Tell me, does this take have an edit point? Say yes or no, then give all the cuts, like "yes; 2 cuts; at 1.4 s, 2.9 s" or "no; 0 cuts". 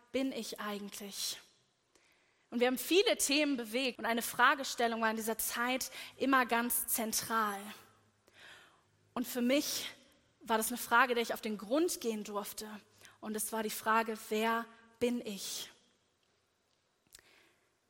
yes; 1 cut; at 4.0 s